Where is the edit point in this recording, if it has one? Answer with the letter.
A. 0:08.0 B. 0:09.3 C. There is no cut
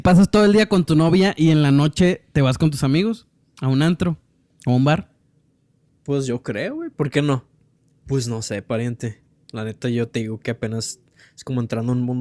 A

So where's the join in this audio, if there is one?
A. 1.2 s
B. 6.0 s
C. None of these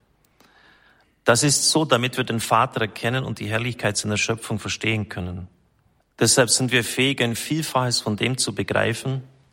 B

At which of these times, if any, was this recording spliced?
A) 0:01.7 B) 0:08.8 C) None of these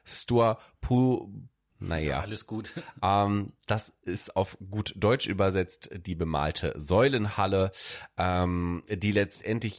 A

